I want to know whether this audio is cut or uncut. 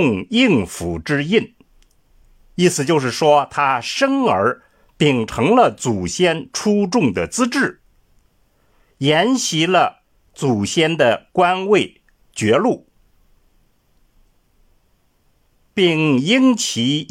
uncut